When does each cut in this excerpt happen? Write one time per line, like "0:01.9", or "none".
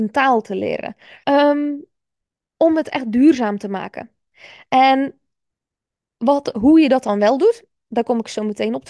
0:01.2